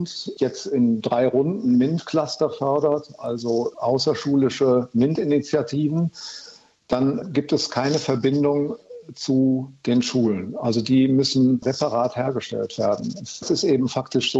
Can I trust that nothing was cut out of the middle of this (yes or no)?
yes